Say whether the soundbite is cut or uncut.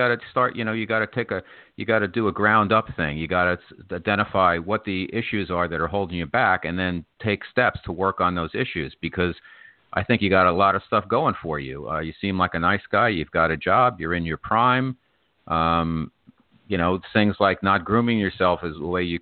uncut